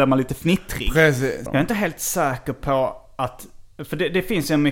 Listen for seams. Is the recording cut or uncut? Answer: cut